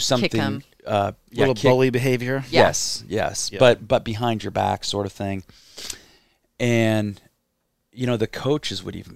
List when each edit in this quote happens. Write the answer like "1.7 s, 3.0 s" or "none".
none